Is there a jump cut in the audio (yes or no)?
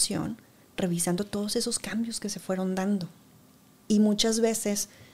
no